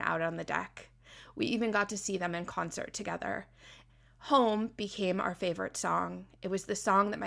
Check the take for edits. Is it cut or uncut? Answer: uncut